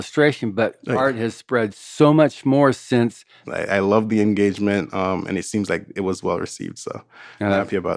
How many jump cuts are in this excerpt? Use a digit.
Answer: 1